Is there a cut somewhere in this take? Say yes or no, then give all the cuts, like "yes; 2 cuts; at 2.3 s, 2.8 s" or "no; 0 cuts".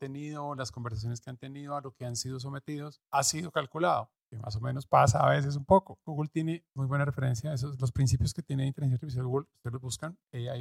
yes; 2 cuts; at 6.0 s, 9.5 s